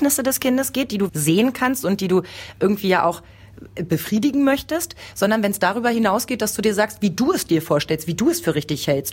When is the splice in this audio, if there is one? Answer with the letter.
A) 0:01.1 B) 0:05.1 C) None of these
A